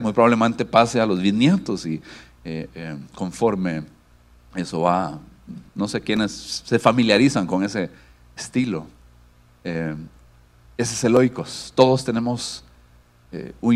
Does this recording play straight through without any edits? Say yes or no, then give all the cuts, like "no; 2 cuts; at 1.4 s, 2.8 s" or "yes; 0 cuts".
yes; 0 cuts